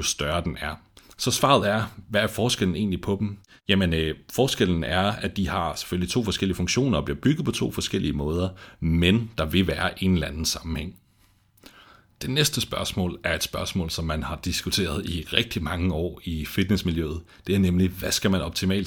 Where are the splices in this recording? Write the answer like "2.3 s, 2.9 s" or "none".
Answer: none